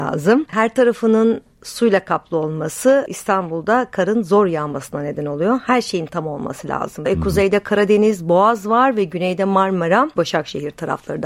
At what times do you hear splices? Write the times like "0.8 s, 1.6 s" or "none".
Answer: 7.0 s, 10.2 s